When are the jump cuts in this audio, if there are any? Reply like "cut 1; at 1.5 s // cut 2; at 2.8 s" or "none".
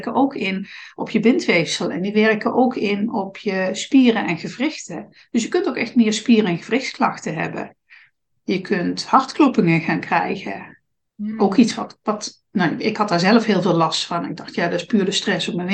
none